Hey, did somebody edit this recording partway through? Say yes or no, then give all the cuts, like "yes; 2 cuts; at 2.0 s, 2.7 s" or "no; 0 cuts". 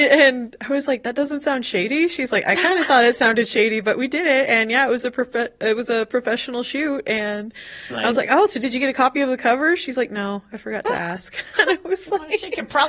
no; 0 cuts